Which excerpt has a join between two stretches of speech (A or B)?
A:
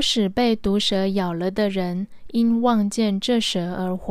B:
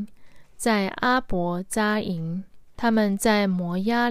B